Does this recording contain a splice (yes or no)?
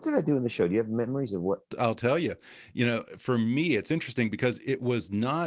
no